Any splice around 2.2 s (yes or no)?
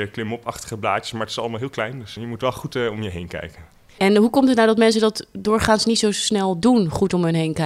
yes